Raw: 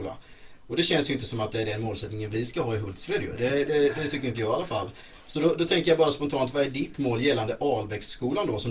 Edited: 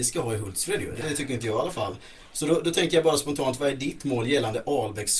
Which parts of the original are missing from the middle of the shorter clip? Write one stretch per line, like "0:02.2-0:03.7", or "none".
0:03.4-0:03.9